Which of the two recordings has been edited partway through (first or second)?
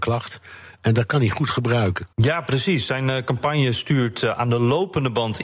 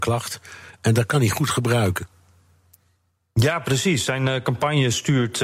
first